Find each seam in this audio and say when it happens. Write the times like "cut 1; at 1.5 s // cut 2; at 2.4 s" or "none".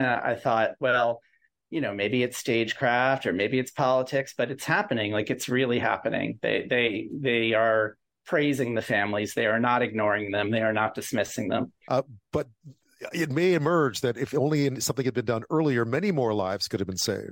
cut 1; at 11.9 s